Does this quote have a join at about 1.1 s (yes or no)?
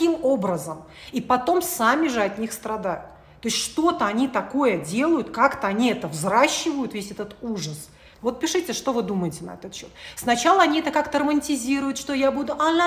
no